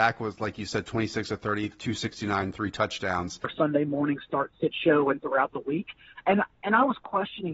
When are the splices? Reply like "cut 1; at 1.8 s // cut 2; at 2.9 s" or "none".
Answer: cut 1; at 3.4 s